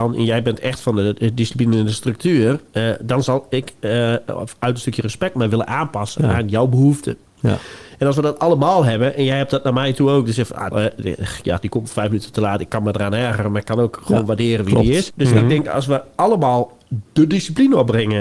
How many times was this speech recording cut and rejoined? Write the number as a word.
two